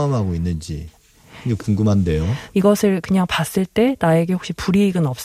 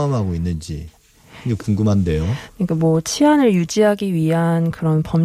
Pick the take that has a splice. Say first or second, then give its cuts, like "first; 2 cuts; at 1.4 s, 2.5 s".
first; 1 cut; at 2.5 s